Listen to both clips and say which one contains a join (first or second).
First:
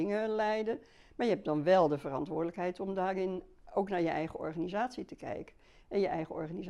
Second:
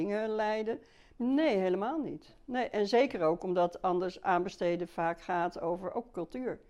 second